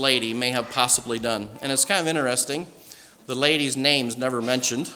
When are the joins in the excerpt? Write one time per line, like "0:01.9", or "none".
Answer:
none